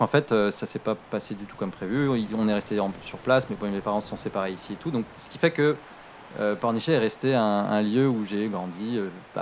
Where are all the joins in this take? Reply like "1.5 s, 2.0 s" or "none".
none